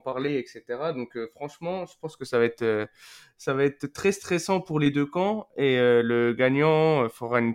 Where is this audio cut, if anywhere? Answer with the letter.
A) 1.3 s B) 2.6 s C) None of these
C